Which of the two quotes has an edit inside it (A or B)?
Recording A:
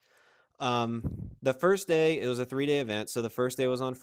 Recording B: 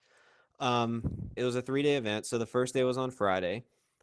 B